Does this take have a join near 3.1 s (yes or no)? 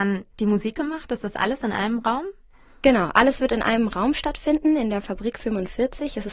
no